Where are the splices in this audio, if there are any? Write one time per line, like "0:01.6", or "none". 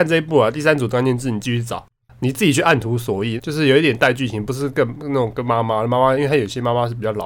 0:03.4